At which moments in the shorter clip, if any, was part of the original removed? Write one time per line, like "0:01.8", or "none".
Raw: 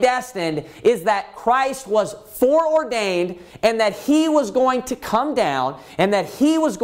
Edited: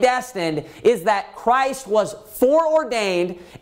none

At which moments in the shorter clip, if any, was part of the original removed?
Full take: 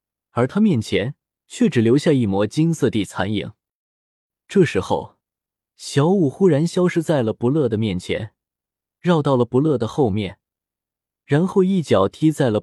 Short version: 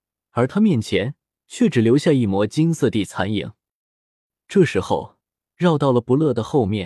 0:05.4

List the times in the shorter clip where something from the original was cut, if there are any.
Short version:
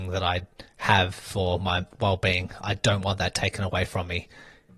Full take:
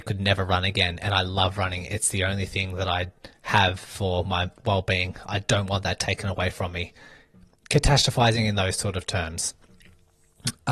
none

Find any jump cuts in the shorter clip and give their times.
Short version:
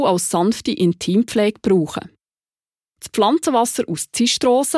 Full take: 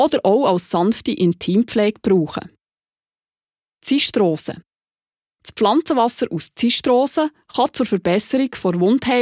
0:02.9

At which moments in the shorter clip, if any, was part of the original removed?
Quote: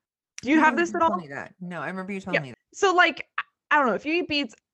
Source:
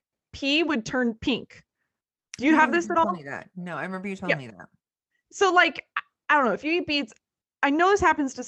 0:02.5

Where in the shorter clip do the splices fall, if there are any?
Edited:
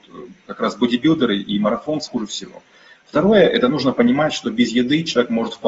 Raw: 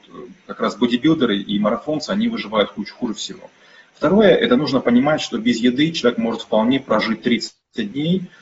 0:02.1

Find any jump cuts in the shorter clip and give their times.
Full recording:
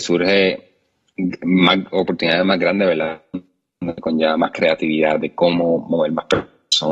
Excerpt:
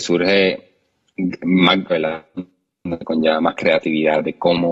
0:01.9

